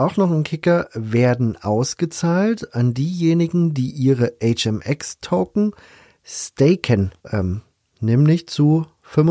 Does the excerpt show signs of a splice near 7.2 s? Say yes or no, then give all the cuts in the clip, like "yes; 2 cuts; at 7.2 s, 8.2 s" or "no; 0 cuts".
yes; 1 cut; at 7.2 s